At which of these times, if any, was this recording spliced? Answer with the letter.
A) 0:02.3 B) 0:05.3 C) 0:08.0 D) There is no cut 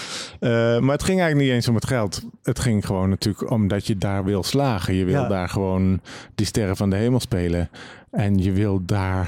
D